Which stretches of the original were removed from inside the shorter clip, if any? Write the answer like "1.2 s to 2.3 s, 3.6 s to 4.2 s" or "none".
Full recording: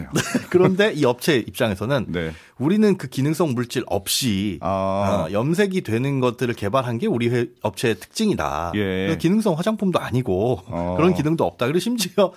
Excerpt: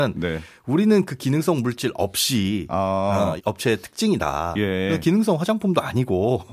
5.3 s to 7.5 s

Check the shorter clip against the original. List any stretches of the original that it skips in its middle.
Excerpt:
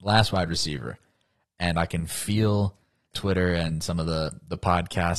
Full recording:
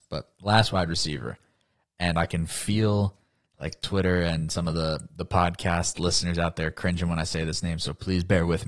3.5 s to 3.8 s

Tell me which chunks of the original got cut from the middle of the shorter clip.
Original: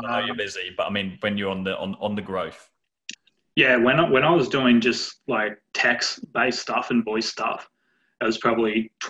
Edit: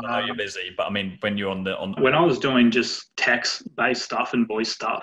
2.0 s to 4.1 s, 5.2 s to 5.7 s

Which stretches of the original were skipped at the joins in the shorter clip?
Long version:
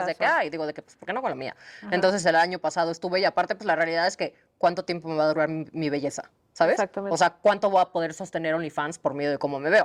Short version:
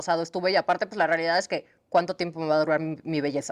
none

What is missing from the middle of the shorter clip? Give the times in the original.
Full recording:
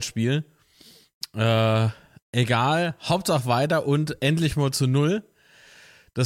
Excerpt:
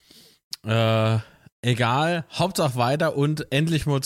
none

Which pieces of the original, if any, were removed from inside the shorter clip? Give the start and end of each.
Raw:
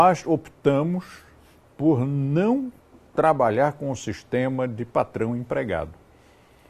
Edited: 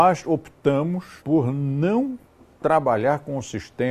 1.2 s to 1.7 s

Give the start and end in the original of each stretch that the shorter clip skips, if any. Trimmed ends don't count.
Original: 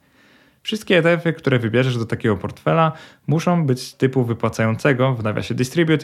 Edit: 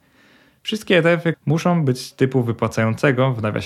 1.3 s to 3.2 s

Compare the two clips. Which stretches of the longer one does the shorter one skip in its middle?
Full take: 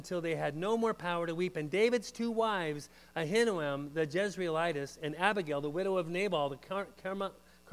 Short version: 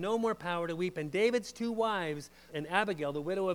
3.1 s to 5.0 s

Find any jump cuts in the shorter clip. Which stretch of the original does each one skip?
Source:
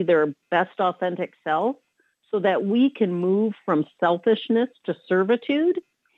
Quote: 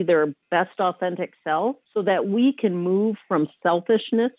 1.8 s to 2.2 s

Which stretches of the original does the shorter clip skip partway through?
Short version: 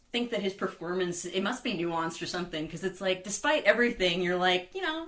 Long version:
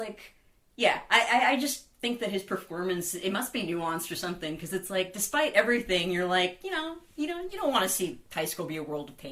none

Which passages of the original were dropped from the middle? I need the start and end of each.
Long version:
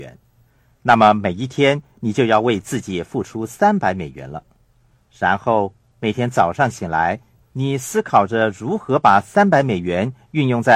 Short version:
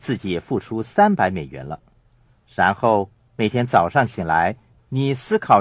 none

